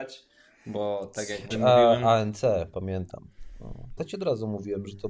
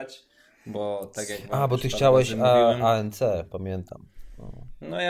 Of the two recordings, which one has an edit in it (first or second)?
first